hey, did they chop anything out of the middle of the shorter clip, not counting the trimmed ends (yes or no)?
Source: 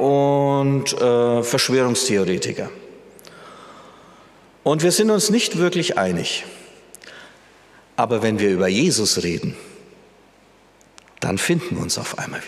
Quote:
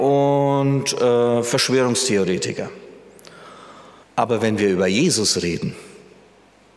yes